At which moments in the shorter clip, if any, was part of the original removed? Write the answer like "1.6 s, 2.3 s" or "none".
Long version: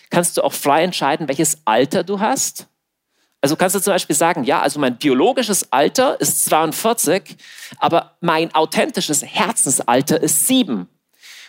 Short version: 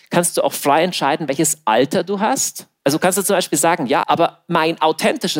2.8 s, 4.0 s